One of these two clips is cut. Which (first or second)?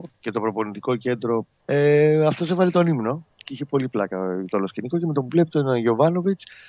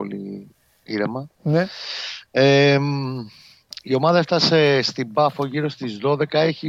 first